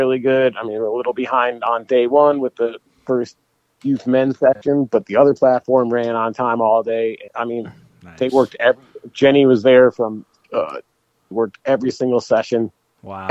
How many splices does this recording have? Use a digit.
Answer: 2